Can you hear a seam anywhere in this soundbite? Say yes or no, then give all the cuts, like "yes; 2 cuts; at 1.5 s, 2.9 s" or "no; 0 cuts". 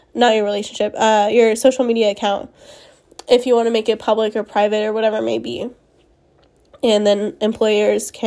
no; 0 cuts